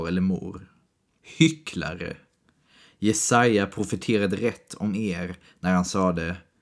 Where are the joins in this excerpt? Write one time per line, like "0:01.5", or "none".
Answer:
0:01.1